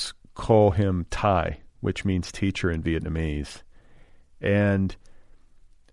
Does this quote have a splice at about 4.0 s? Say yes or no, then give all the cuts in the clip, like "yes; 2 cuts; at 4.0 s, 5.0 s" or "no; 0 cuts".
no; 0 cuts